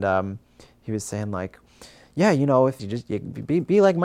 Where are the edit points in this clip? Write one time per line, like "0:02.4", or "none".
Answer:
0:02.8